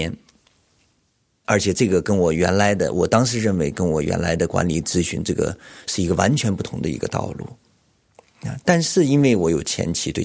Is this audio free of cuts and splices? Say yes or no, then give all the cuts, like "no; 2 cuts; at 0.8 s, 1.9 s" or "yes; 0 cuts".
no; 1 cut; at 1.4 s